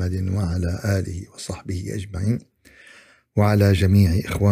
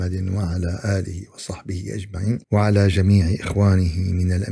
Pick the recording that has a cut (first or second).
second